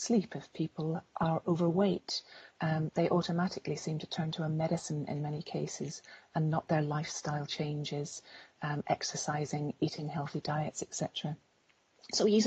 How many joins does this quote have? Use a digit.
0